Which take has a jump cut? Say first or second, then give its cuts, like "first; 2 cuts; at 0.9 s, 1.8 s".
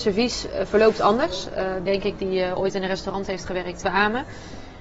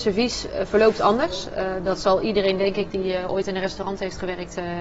first; 2 cuts; at 1.9 s, 3.8 s